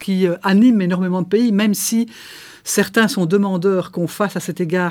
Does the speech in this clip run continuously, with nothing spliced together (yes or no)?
yes